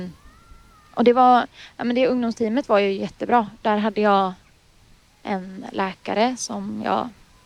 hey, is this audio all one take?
yes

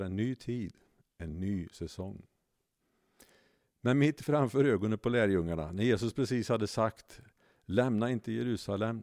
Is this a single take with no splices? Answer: yes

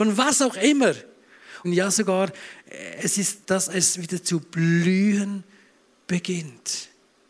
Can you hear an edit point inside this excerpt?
yes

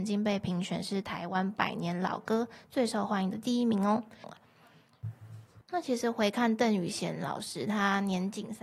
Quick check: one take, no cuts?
no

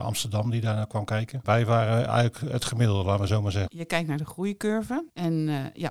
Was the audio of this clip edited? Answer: yes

